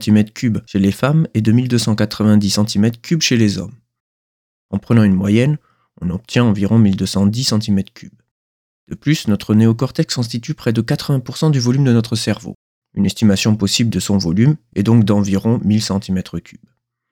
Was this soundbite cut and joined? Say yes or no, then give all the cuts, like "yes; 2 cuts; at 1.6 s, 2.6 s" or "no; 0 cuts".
no; 0 cuts